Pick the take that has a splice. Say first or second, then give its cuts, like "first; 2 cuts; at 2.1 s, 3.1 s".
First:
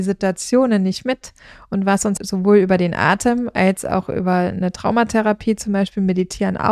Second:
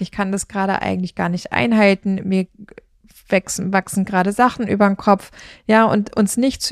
first; 1 cut; at 2.2 s